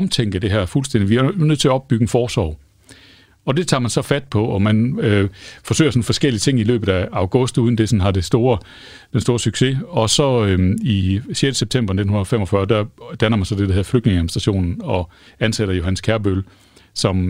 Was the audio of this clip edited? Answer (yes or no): no